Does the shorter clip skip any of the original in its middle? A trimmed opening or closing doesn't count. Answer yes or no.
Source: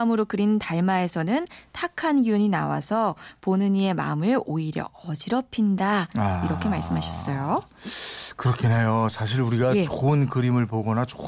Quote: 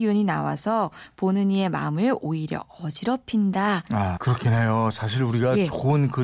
yes